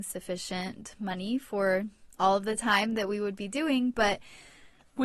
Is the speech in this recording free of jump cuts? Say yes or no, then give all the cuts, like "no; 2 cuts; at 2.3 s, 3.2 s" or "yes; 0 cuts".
yes; 0 cuts